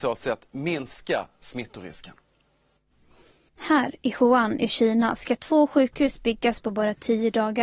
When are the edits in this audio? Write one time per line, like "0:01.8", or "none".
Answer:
none